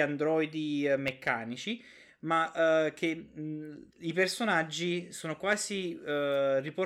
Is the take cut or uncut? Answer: cut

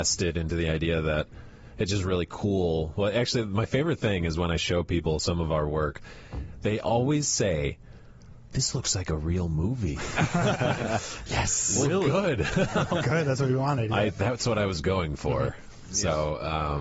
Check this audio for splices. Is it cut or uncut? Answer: uncut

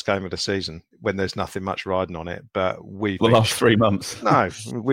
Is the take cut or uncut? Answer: cut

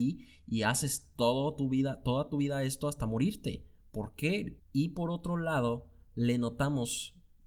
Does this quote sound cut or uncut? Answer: cut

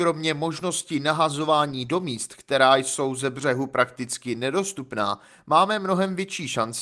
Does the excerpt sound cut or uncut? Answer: uncut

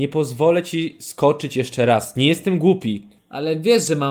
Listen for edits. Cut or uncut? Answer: cut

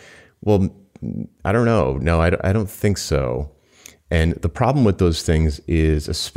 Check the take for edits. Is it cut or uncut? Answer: uncut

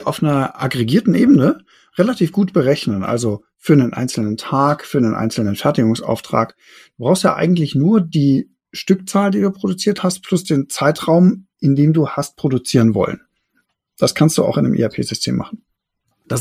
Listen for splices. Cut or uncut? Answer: uncut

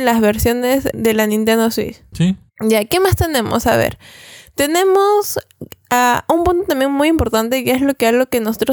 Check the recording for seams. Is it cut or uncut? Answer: cut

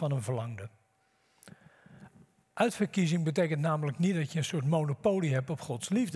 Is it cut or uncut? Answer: uncut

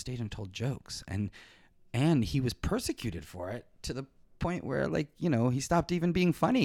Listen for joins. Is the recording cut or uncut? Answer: uncut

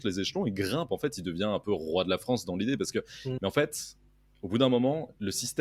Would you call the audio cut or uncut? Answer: cut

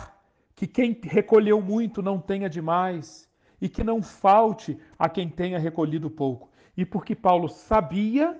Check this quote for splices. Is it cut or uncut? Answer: uncut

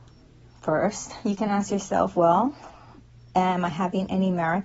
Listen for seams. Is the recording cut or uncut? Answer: uncut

